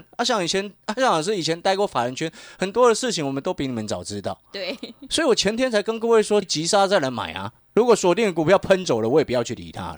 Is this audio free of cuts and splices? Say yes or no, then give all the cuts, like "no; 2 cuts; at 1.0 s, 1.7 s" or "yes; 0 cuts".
no; 2 cuts; at 6.4 s, 7.6 s